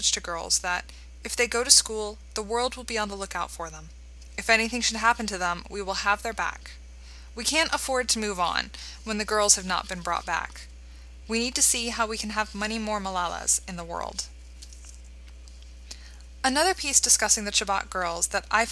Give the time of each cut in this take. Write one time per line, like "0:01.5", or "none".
none